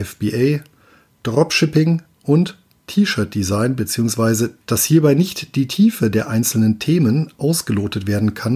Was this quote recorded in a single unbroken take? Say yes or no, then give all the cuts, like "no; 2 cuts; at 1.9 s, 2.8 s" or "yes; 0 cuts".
no; 1 cut; at 4.6 s